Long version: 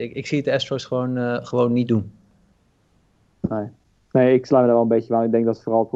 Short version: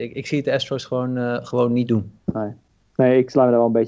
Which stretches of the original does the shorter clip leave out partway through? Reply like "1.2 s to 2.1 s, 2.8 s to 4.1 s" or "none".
2.2 s to 3.3 s